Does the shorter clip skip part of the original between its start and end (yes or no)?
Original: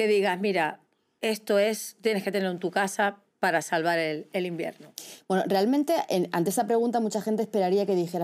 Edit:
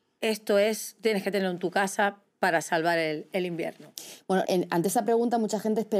yes